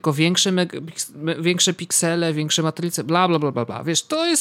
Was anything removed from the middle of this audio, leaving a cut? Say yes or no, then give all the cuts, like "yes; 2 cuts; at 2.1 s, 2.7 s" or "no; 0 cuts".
no; 0 cuts